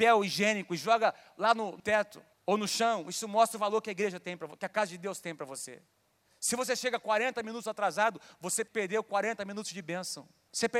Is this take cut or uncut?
uncut